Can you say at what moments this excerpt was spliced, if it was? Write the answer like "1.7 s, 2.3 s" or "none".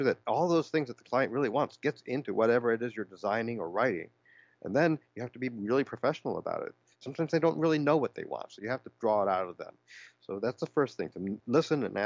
6.9 s